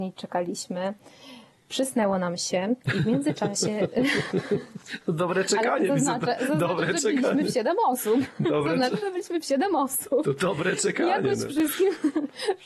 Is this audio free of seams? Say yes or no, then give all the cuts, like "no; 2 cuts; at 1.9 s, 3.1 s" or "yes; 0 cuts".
yes; 0 cuts